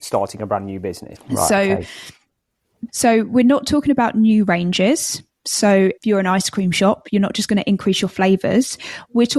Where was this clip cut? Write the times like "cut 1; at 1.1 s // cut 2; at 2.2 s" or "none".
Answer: cut 1; at 1.2 s // cut 2; at 2.9 s // cut 3; at 6.0 s